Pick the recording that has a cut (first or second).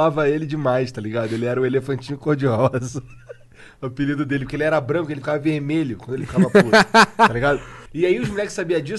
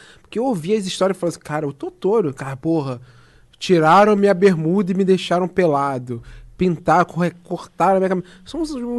first